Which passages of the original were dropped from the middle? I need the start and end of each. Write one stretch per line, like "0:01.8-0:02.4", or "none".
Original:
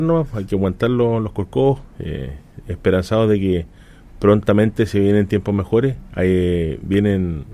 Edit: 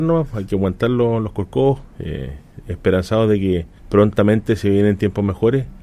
0:03.8-0:04.1